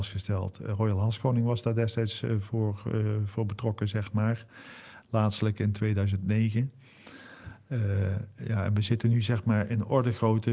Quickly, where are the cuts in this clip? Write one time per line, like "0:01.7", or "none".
none